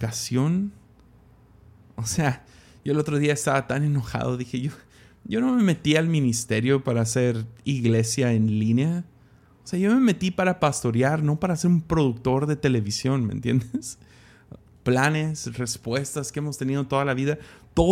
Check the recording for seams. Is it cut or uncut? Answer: cut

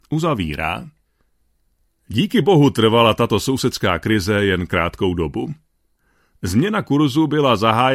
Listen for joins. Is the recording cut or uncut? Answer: uncut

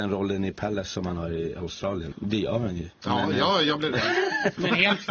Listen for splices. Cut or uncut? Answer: cut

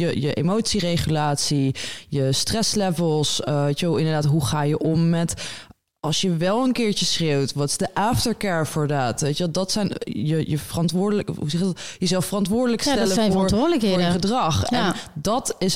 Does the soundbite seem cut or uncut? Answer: uncut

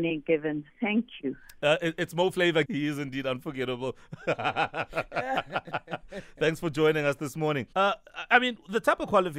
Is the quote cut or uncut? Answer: cut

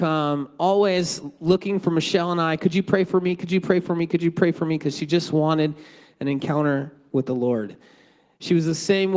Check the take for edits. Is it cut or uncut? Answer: uncut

